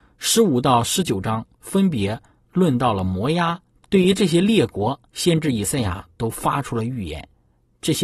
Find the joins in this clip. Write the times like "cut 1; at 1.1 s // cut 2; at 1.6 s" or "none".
cut 1; at 3.8 s // cut 2; at 5.1 s